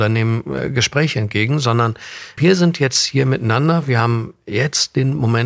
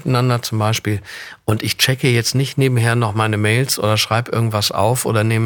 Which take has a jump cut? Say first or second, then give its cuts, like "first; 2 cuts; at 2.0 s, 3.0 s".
first; 1 cut; at 2.4 s